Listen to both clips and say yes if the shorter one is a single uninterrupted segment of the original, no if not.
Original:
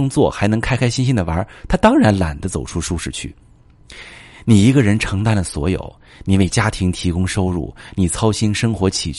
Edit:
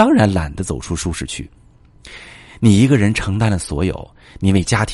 yes